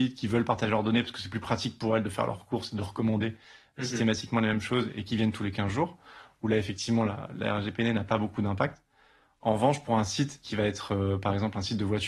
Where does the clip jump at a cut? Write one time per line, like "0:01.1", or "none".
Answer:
none